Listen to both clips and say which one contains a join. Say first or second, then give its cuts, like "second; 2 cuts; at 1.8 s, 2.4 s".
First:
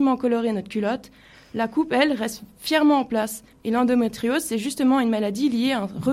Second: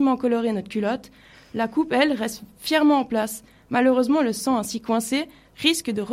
first; 1 cut; at 3.5 s